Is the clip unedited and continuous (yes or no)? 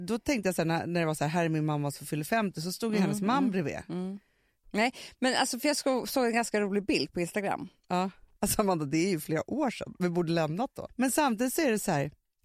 no